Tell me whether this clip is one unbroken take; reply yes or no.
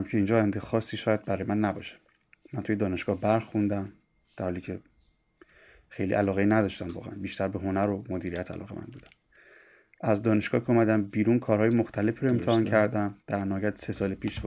no